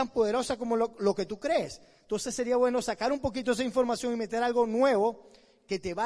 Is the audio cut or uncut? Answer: uncut